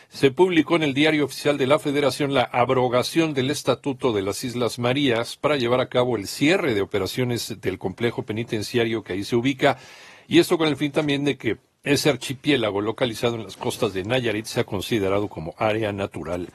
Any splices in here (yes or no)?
no